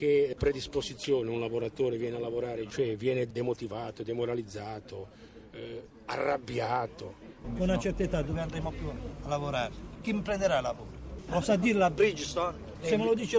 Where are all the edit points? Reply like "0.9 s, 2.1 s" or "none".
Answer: 7.4 s, 10.0 s

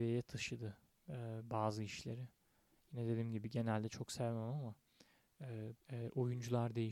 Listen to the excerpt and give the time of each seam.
5.8 s

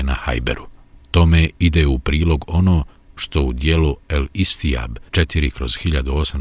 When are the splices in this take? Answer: 1.0 s, 5.1 s

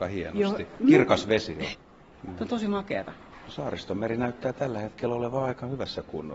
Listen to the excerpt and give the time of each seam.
1.7 s

